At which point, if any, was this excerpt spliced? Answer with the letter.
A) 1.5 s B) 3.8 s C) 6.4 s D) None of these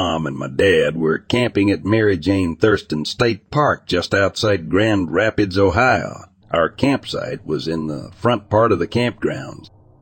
C